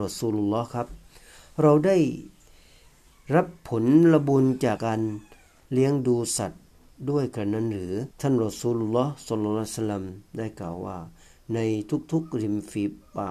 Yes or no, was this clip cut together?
yes